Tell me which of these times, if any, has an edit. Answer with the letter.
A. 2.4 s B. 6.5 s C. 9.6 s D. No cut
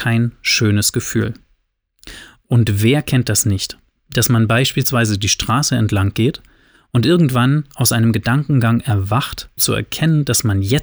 C